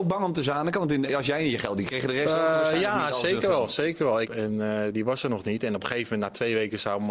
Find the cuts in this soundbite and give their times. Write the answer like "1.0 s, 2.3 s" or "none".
1.9 s, 4.2 s